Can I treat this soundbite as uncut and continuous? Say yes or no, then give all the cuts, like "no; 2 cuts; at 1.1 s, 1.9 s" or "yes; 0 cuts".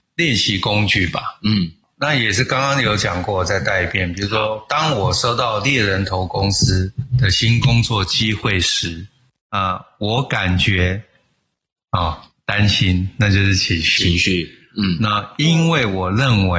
yes; 0 cuts